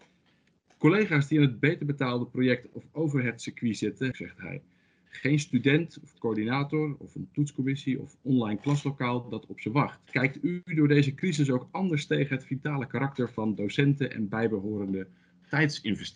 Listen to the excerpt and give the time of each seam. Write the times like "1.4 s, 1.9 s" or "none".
4.1 s, 10.1 s